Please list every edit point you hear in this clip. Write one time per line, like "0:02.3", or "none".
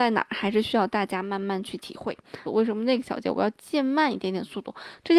0:02.5